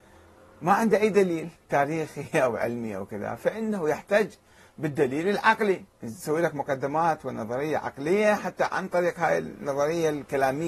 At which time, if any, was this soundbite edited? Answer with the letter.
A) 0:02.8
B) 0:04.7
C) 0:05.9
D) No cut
C